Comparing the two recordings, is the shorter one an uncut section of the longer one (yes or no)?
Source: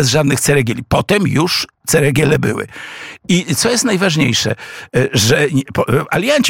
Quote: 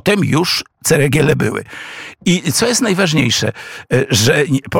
yes